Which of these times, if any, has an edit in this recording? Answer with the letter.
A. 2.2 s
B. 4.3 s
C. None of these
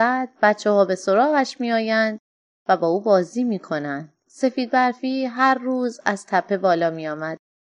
B